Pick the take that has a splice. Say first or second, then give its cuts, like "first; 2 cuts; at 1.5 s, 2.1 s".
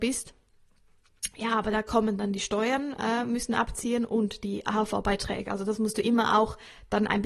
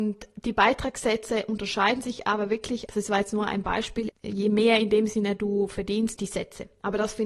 second; 3 cuts; at 2.9 s, 4.1 s, 6.2 s